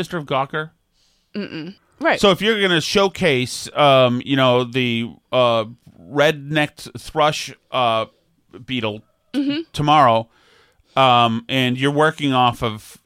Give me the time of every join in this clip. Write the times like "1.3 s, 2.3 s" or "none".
1.8 s